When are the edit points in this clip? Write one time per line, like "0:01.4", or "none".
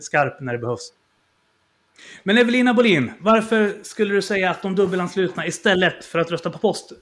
none